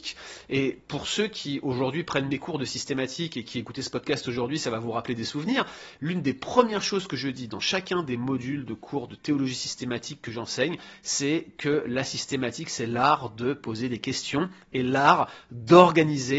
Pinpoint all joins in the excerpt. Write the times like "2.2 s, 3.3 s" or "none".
none